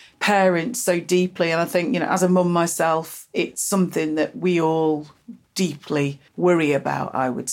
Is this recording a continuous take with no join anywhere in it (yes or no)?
no